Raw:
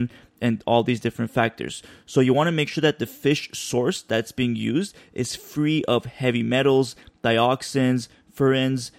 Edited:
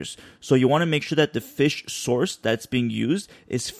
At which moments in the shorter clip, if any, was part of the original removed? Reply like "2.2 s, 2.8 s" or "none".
none